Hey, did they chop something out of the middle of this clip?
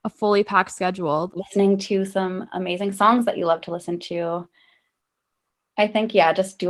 yes; 1 cut; at 1.3 s

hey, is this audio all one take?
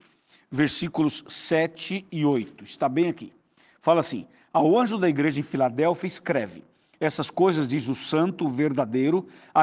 yes; 0 cuts

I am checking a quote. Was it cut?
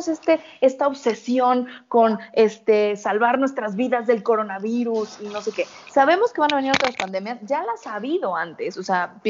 no; 0 cuts

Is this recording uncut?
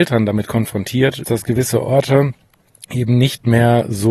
no; 1 cut; at 1.2 s

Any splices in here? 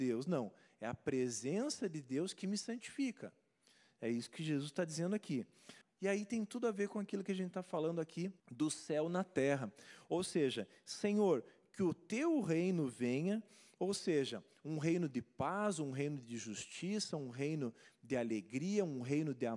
yes; 2 cuts; at 5.8 s, 8.4 s

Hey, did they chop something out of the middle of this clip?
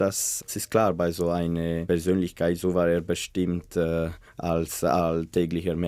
no; 0 cuts

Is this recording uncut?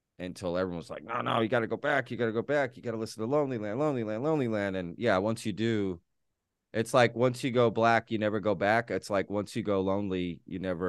yes; 0 cuts

